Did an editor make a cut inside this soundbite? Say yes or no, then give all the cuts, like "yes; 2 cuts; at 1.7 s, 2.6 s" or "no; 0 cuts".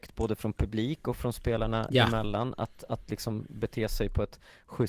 no; 0 cuts